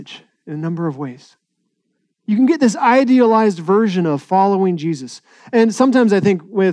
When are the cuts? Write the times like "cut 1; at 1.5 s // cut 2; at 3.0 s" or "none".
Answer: cut 1; at 2.1 s